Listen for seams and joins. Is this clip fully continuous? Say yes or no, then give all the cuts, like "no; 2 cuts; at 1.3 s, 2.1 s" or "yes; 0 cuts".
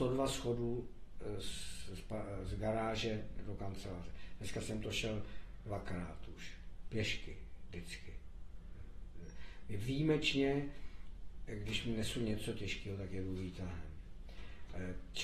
yes; 0 cuts